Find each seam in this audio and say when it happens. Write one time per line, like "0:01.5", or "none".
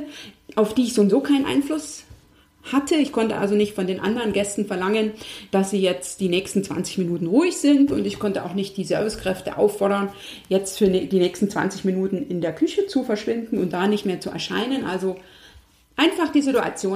none